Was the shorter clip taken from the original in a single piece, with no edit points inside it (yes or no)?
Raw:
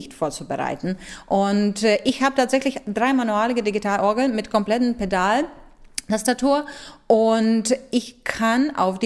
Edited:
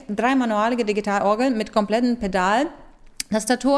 yes